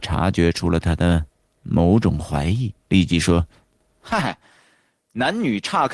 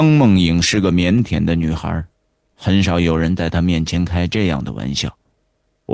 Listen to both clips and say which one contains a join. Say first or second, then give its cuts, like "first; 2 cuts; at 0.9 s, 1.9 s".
first; 1 cut; at 2.8 s